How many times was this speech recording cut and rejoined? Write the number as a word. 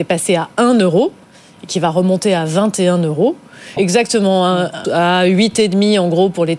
two